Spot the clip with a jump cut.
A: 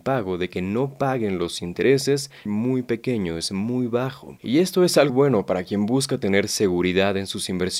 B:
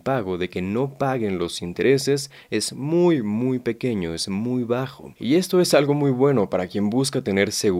A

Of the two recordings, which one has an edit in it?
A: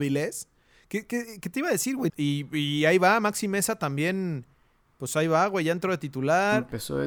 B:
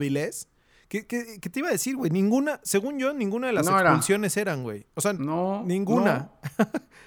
A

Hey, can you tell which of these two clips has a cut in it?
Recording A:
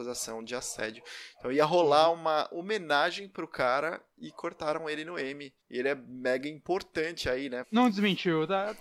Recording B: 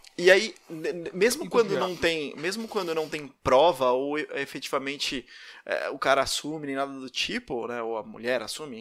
A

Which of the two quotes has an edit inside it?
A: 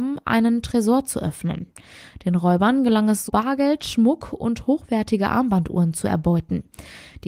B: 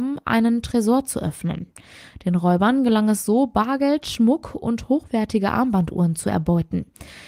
A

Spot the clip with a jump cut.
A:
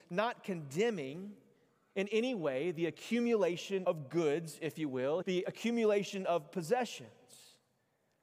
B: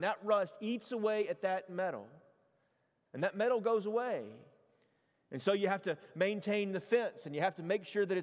A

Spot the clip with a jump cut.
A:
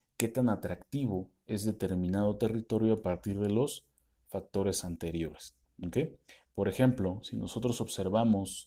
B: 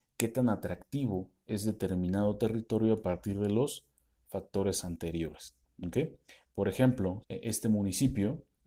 B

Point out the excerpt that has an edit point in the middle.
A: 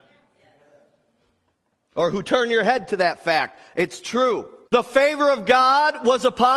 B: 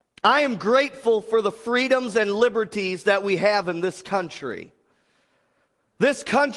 A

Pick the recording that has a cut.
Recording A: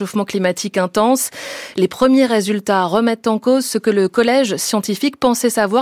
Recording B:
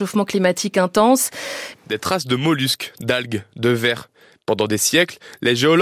B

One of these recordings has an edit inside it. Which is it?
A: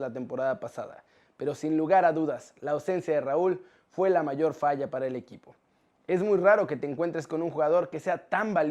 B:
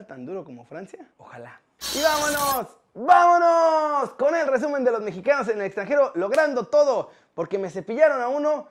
B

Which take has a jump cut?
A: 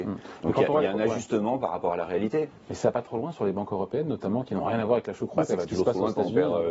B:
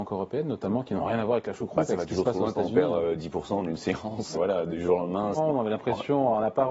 B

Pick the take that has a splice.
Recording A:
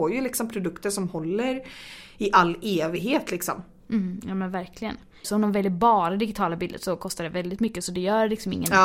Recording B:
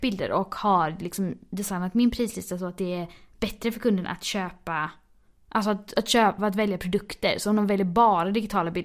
A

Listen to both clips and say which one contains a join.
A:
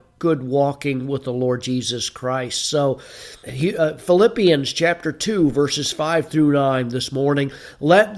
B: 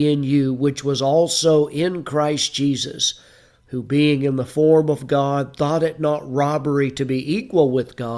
A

